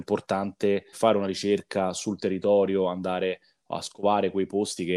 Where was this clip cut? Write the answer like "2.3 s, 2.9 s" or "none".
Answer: 0.9 s